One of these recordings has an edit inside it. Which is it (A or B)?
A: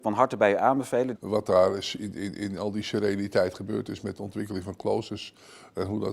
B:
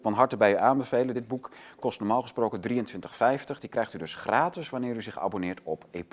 A